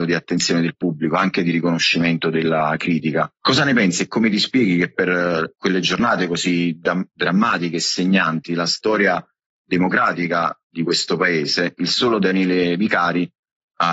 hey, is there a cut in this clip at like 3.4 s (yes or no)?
yes